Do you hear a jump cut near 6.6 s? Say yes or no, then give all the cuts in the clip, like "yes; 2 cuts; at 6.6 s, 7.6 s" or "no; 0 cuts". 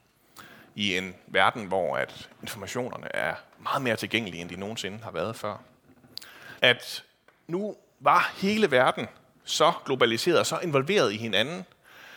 yes; 1 cut; at 6.6 s